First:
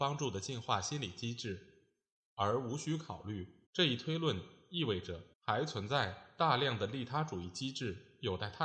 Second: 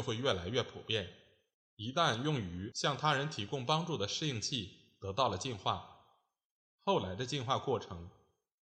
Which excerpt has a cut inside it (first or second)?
first